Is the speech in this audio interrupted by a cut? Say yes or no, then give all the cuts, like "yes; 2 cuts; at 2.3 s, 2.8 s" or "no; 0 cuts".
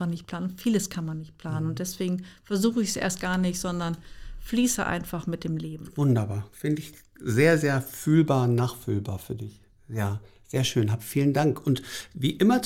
no; 0 cuts